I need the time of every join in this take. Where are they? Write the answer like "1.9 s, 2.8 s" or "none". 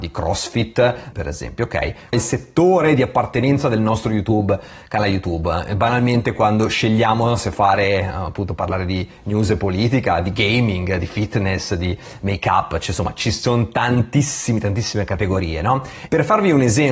1.1 s, 2.1 s